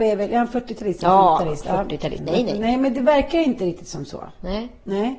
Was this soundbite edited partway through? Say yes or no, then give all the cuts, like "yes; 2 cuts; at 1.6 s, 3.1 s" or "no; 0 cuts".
yes; 1 cut; at 2.2 s